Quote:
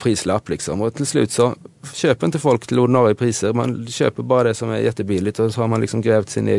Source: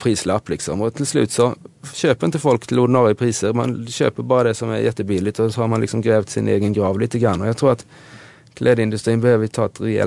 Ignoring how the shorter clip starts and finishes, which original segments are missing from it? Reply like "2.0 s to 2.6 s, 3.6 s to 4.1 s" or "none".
none